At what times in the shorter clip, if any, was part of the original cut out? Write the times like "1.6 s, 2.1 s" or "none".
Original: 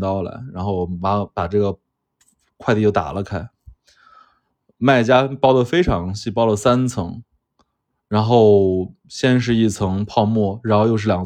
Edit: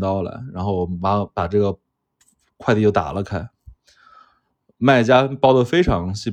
none